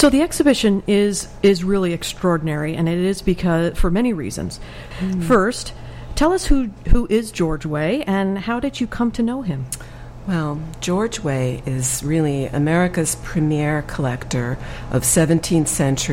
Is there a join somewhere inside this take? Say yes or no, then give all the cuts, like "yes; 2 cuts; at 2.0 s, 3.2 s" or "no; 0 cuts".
yes; 1 cut; at 4.9 s